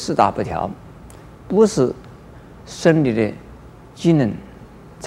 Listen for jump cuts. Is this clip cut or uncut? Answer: uncut